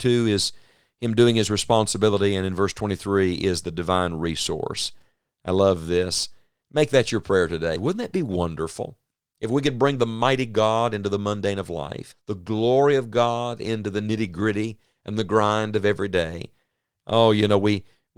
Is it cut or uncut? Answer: cut